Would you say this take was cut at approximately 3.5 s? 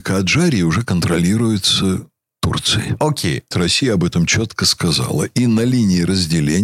yes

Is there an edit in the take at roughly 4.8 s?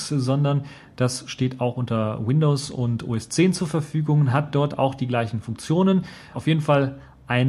no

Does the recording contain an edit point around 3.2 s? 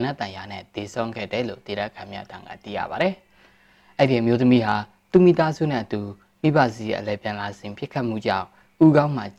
no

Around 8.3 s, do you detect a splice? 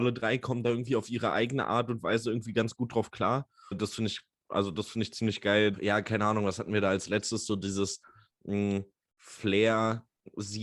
no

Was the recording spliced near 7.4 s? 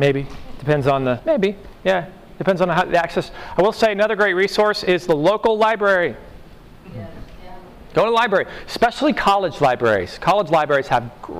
no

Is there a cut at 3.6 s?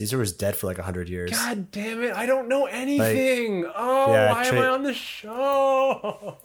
no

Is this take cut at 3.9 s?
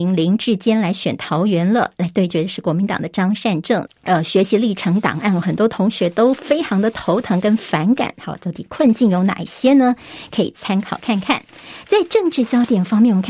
yes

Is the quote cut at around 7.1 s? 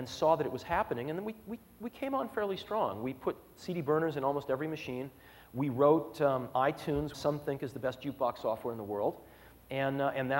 yes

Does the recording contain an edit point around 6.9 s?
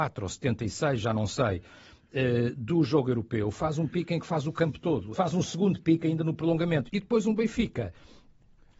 yes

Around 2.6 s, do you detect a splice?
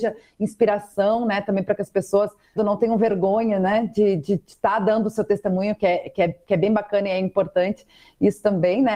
yes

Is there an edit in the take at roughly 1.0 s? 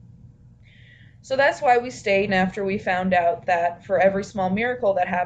no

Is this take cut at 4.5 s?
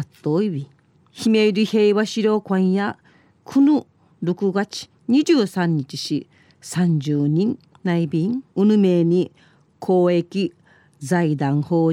no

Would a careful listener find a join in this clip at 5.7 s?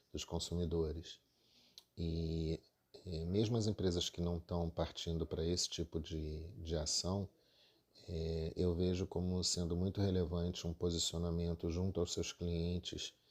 no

